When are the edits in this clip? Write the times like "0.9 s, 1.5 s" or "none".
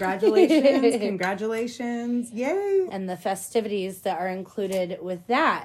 2.9 s